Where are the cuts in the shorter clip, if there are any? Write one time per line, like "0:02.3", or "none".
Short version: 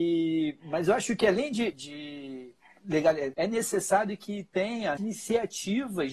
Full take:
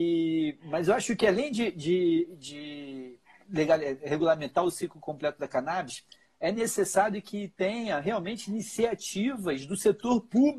0:01.7
0:03.3
0:05.0

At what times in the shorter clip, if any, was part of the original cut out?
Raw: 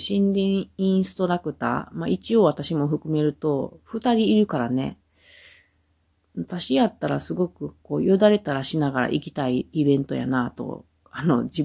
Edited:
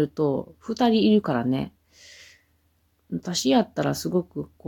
none

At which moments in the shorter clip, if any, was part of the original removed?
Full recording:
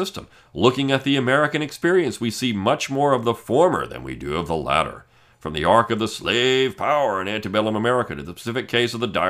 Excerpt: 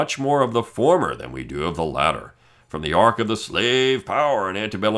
none

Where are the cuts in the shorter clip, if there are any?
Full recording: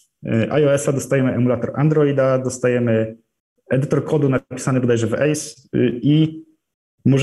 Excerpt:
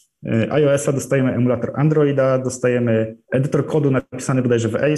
0:03.2

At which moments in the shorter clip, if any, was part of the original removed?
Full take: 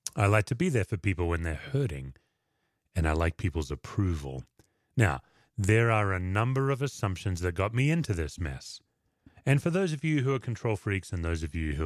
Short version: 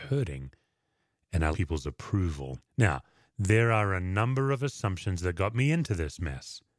0:01.5
0:02.7

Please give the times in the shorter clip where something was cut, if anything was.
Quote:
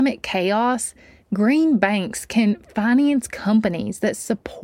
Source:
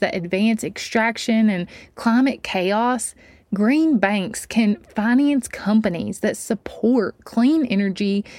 none

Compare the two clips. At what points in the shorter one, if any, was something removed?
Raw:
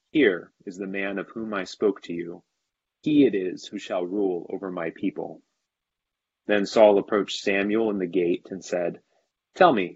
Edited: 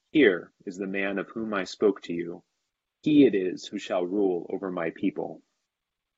none

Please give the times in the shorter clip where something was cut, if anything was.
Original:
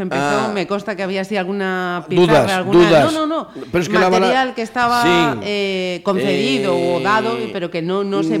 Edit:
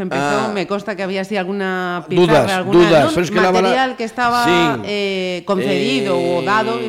0:03.1

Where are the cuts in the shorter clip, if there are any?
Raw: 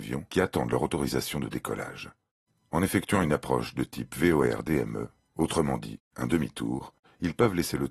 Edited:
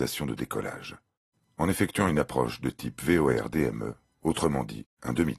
none

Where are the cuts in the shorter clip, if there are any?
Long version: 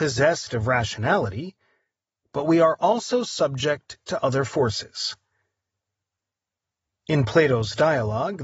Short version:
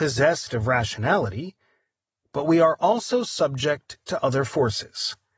none

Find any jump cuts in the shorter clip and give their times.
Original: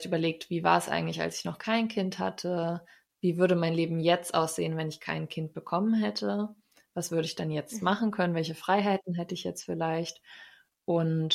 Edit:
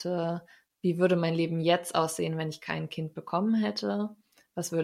none

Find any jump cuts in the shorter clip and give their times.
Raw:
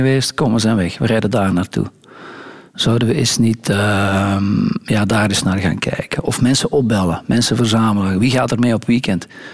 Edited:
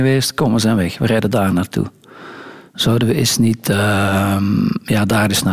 none

